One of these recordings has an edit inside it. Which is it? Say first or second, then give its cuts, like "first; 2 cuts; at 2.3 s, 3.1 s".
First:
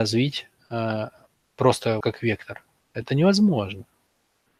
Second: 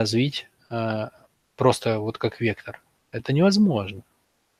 first; 1 cut; at 2.0 s